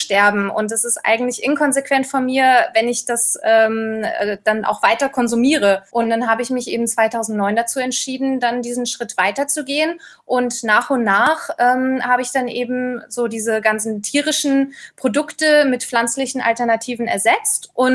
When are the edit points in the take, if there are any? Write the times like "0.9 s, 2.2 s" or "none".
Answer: 5.9 s